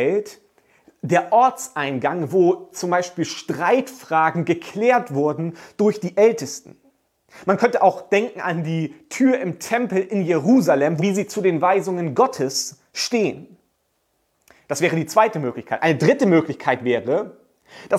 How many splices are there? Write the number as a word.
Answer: one